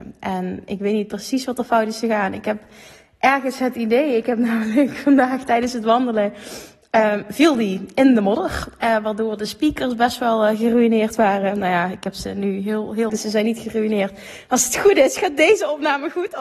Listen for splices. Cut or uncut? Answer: cut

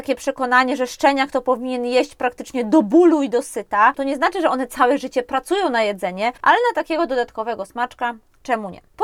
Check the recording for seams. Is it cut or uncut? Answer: cut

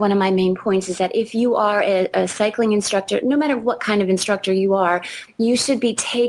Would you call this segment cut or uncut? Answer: uncut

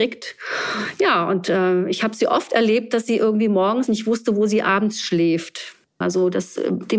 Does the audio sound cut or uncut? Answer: cut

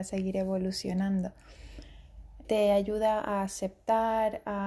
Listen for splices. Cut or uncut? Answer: cut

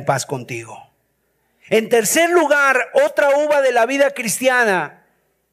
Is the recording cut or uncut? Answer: uncut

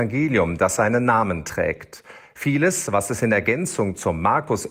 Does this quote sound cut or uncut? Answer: uncut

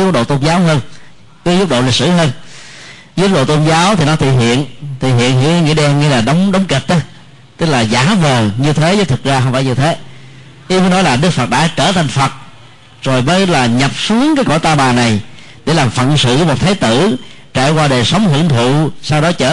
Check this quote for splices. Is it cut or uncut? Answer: uncut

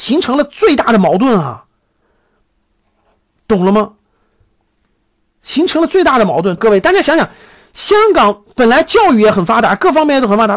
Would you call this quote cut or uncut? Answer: cut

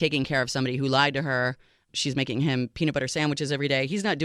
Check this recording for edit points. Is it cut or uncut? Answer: uncut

